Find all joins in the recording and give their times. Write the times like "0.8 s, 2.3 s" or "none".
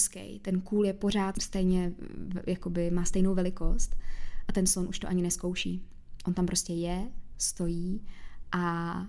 1.3 s